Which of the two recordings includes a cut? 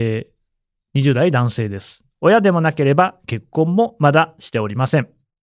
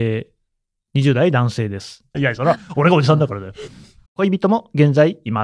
second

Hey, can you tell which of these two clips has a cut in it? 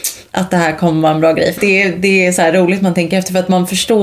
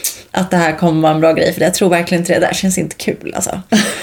first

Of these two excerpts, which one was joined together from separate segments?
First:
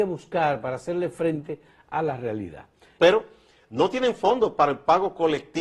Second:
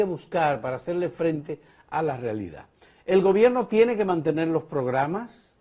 first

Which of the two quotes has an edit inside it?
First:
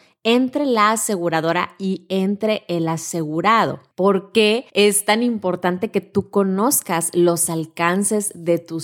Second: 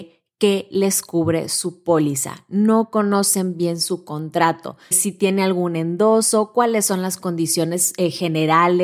second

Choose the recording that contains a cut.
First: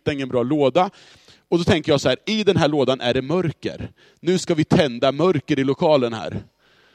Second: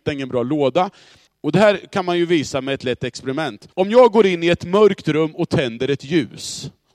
second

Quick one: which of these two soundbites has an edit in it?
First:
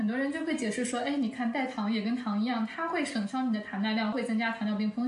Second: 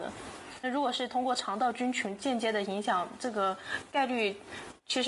first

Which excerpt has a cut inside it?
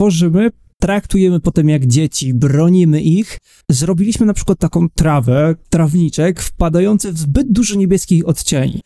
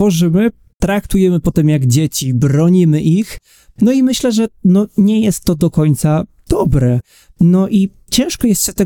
first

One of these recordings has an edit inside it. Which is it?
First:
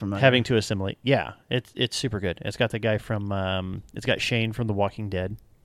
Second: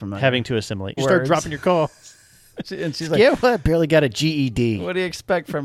second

